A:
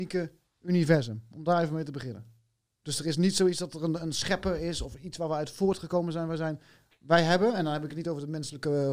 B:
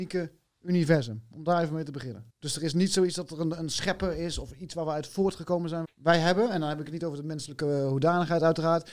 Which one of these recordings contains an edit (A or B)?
B